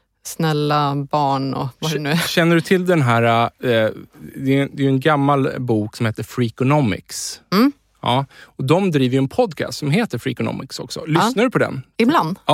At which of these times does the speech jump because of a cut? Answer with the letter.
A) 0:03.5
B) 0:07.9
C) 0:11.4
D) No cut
D